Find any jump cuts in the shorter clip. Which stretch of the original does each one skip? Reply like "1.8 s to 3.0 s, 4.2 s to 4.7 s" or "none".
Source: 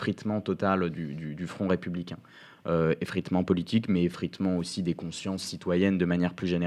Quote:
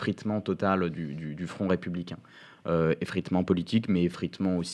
none